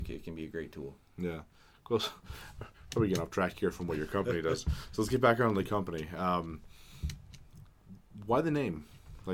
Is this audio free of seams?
yes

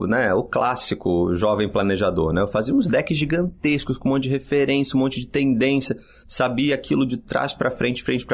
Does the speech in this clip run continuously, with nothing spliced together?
yes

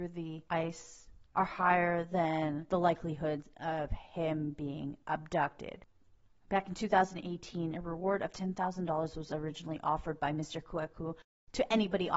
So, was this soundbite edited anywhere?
yes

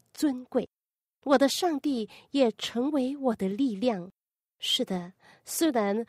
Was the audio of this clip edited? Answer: no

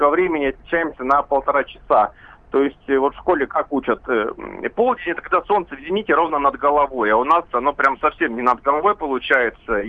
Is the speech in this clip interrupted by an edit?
no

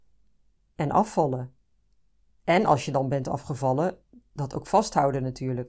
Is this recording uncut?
yes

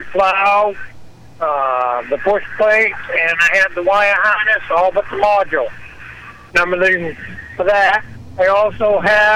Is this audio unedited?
no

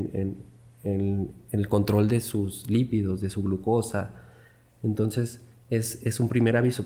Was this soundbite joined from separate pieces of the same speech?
no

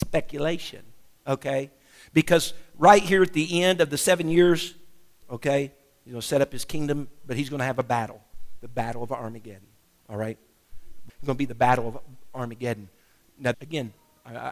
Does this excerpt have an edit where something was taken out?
yes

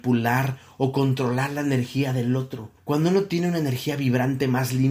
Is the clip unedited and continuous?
no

